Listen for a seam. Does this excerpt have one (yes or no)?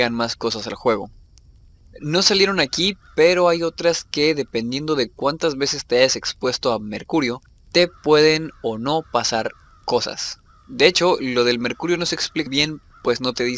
yes